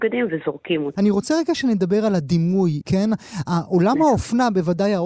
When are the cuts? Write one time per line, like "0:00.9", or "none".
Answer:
0:00.9
0:02.8